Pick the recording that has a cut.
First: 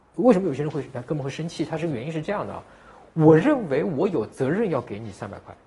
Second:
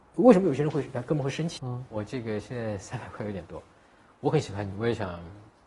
second; 1 cut; at 1.6 s

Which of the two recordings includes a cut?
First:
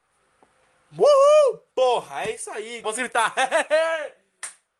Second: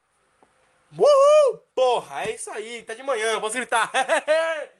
first; 1 cut; at 2.8 s

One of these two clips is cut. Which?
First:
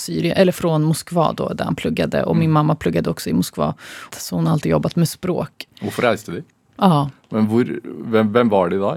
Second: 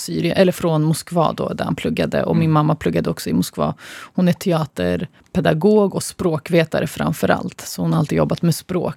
first; 2 cuts; at 4.1 s, 6.7 s

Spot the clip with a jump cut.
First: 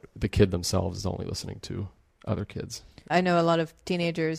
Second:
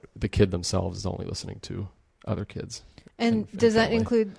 first; 1 cut; at 3.1 s

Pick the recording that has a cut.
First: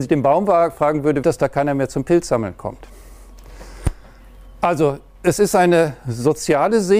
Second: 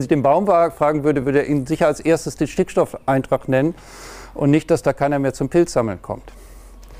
first; 1 cut; at 1.2 s

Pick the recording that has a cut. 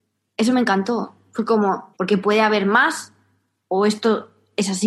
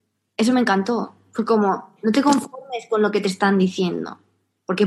first; 1 cut; at 1.9 s

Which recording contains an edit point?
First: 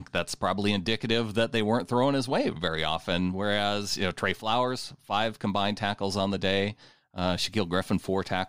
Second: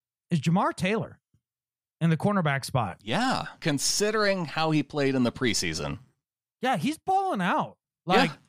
second; 1 cut; at 3.6 s

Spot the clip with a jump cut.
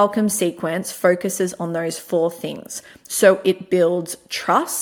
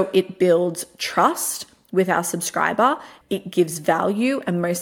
second; 1 cut; at 3.2 s

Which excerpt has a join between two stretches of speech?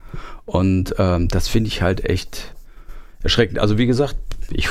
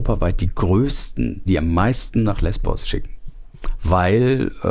second; 1 cut; at 1.5 s

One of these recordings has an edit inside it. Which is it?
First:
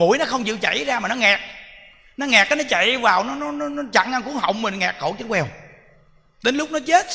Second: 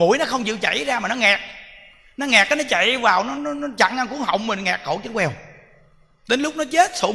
second; 1 cut; at 3.4 s

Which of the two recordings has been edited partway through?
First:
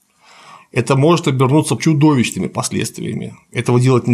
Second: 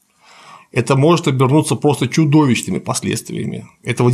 first; 1 cut; at 1.8 s

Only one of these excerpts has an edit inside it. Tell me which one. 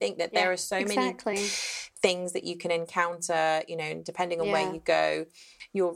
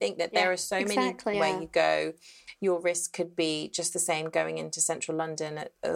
second; 1 cut; at 1.3 s

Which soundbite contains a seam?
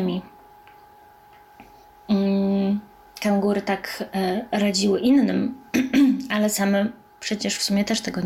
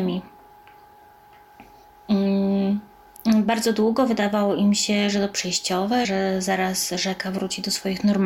second; 2 cuts; at 3.2 s, 6.0 s

